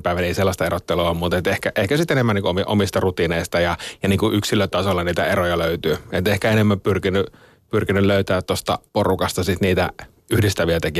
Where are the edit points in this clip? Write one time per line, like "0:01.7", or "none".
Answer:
0:08.9